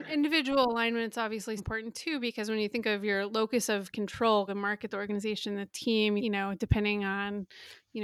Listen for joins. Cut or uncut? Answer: cut